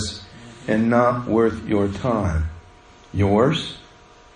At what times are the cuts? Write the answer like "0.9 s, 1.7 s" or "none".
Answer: none